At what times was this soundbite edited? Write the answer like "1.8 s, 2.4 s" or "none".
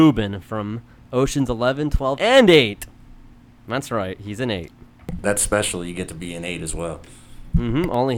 2.2 s

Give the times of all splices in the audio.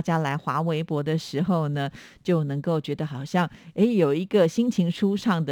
none

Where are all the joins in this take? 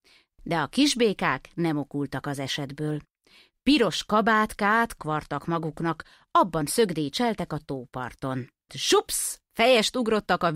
5.0 s, 8.7 s

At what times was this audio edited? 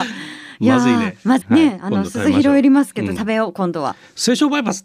1.4 s, 3.2 s

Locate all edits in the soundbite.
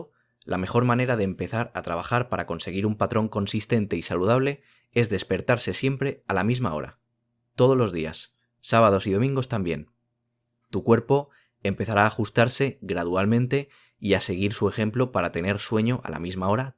none

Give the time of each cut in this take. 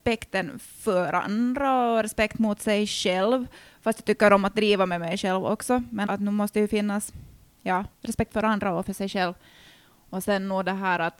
6.1 s, 7.9 s

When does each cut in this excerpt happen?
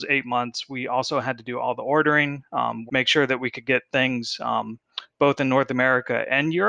2.9 s

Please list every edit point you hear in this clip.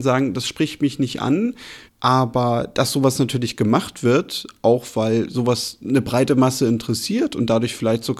1.9 s

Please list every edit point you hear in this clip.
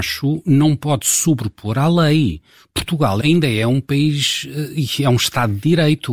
3.2 s

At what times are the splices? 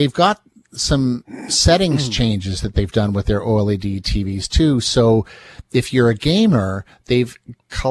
none

